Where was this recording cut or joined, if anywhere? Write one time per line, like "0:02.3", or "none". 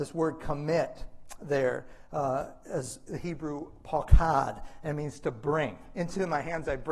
none